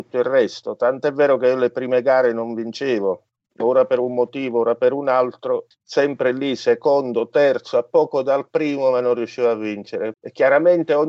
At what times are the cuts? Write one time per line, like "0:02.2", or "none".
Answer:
0:05.7
0:10.1